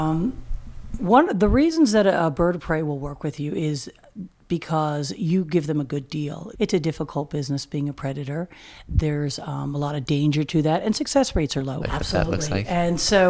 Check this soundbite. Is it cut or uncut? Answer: cut